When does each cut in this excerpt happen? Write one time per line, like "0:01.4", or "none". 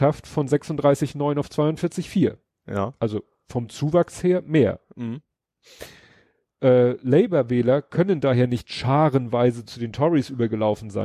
none